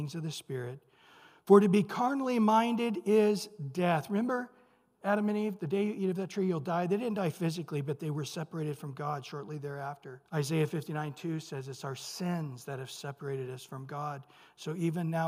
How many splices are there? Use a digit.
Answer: 1